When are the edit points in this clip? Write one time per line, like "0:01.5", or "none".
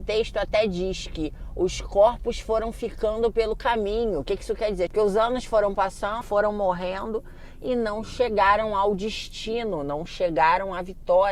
0:04.9
0:06.2